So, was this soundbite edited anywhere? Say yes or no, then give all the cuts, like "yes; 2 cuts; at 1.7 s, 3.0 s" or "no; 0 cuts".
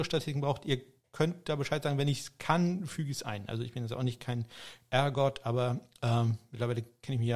no; 0 cuts